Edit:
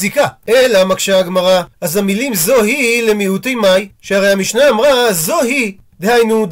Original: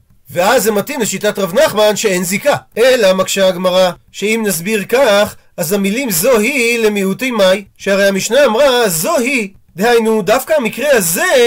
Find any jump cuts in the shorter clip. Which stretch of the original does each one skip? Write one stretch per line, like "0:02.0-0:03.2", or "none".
0:04.0-0:05.5